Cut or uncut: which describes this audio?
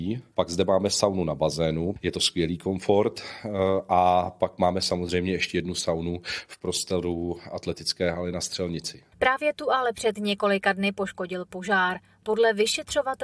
uncut